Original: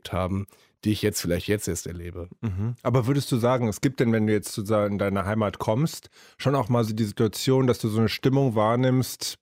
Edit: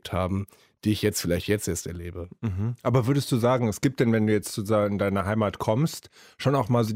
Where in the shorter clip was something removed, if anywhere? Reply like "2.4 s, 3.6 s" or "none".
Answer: none

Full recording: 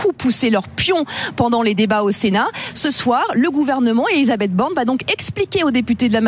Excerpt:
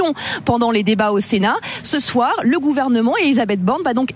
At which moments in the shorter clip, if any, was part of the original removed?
none

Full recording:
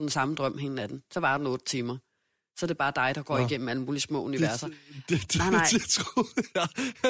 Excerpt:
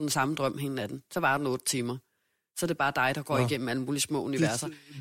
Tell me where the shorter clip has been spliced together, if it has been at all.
none

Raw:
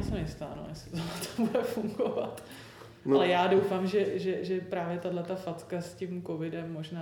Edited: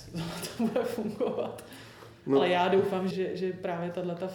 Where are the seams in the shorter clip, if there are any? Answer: 3.1 s

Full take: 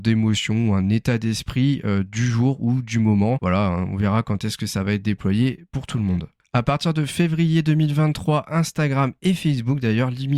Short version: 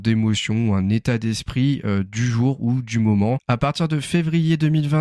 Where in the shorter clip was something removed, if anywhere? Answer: 3.4 s

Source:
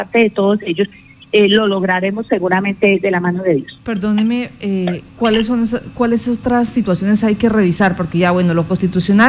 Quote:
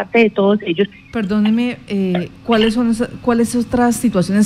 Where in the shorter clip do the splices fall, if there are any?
1.1 s

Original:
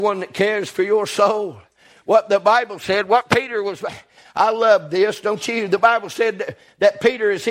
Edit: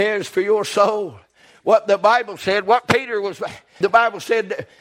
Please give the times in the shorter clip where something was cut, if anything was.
3.8 s

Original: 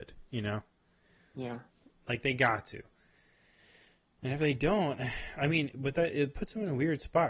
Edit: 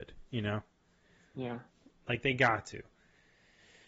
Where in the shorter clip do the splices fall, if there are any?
none

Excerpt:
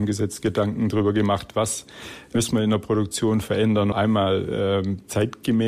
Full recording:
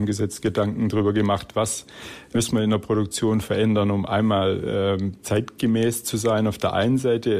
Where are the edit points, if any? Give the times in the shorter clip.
3.9 s

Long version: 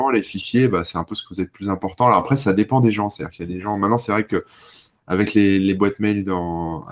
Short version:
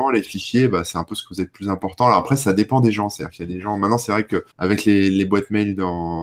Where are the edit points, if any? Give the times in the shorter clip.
4.5 s

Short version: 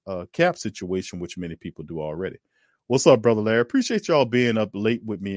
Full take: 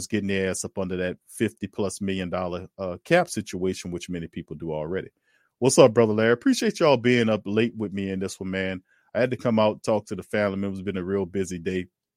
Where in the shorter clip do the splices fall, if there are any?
none

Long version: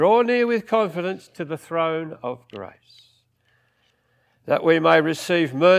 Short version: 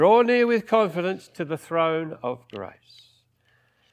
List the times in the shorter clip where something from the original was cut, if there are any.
none

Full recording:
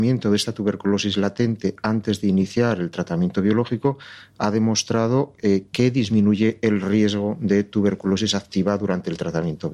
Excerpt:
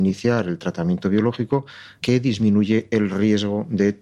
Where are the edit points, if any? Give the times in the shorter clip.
2.0 s

